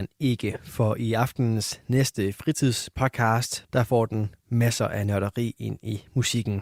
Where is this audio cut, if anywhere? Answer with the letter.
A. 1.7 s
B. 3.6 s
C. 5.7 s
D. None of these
B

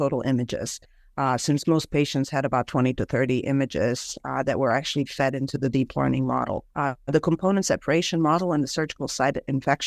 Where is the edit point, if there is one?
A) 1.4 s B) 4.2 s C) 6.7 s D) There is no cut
C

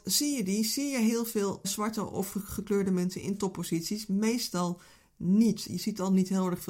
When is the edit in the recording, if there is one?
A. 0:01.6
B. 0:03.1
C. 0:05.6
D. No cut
A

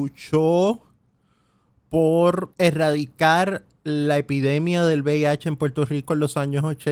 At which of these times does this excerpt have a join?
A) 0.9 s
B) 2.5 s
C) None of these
B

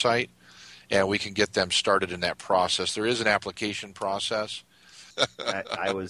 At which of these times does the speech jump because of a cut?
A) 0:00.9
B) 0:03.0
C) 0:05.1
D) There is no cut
C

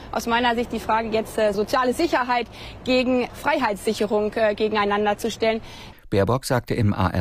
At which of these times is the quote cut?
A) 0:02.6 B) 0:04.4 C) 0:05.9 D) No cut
C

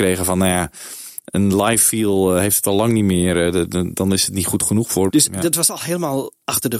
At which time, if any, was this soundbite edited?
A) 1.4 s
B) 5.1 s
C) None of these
B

